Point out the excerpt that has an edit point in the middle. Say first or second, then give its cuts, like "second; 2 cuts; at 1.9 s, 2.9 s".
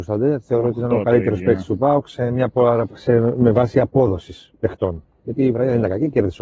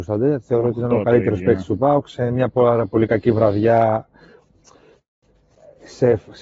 first; 1 cut; at 2.9 s